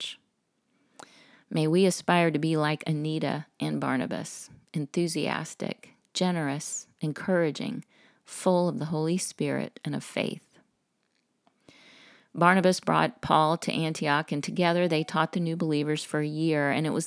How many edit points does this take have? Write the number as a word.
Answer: zero